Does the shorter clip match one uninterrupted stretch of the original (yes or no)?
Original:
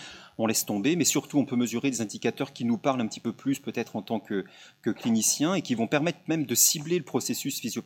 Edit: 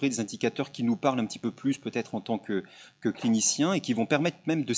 yes